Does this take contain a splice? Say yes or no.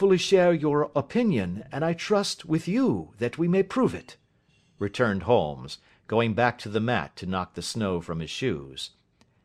no